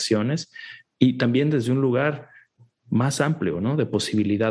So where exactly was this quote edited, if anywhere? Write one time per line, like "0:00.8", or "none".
none